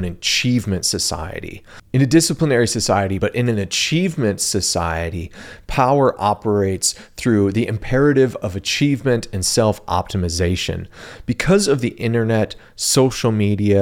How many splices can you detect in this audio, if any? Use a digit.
1